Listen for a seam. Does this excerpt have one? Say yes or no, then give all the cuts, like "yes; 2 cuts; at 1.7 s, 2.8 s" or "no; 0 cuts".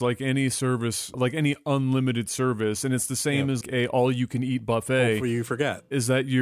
yes; 2 cuts; at 1.1 s, 3.6 s